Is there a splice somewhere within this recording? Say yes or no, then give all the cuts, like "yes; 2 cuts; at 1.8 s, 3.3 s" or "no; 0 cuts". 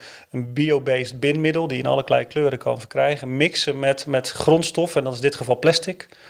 no; 0 cuts